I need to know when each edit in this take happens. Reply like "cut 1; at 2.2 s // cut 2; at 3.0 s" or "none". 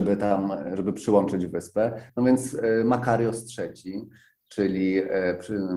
none